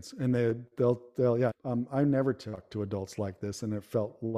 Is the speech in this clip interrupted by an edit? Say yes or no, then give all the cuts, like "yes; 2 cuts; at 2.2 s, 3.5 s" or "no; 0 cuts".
yes; 1 cut; at 1.5 s